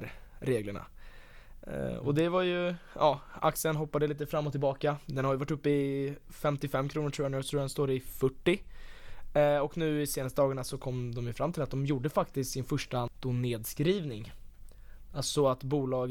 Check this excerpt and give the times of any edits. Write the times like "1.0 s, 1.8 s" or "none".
none